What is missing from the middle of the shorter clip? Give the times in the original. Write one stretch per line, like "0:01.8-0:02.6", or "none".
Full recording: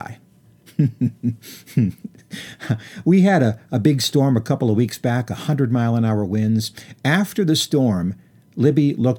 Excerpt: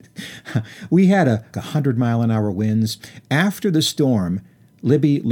0:03.7-0:05.3